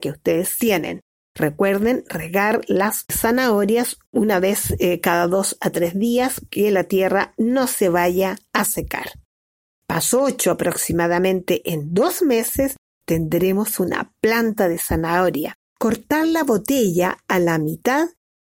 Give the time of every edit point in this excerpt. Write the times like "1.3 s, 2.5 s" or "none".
15.6 s

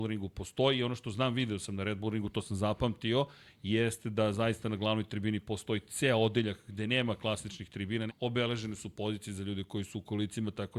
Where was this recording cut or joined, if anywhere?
3.5 s, 8.1 s

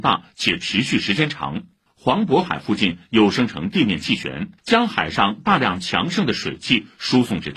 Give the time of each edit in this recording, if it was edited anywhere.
1.9 s, 4.6 s

